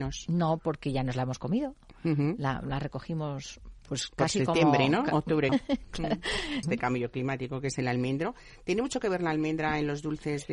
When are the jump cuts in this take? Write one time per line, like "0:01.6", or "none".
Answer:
0:05.5
0:06.6